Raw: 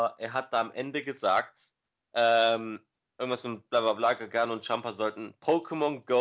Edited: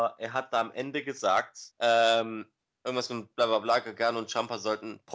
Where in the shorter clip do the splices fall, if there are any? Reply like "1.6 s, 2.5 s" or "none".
1.7 s